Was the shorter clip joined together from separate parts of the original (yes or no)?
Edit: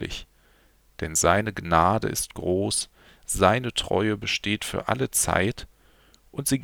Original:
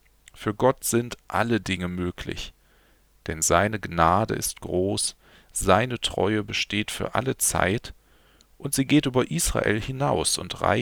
no